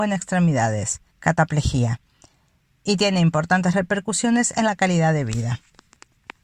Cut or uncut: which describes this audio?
cut